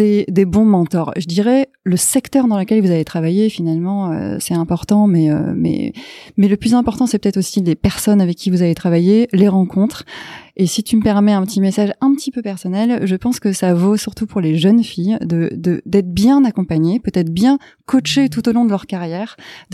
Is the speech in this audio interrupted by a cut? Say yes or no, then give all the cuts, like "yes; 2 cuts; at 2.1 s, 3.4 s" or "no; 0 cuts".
no; 0 cuts